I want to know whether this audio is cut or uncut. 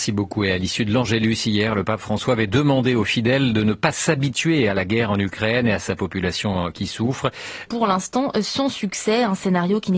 cut